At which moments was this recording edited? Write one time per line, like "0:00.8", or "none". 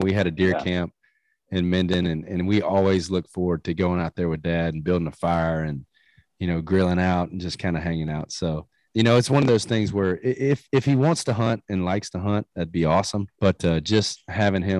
0:08.8
0:13.3